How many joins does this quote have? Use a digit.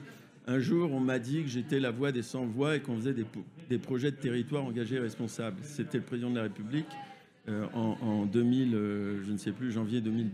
0